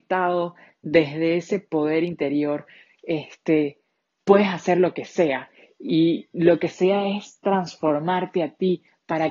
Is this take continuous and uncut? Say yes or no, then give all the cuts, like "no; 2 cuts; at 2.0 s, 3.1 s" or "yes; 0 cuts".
no; 1 cut; at 2.8 s